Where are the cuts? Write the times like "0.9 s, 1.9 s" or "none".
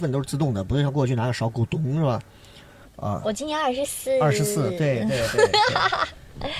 2.8 s